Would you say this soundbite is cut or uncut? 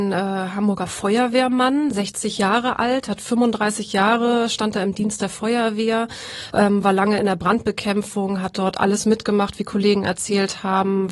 uncut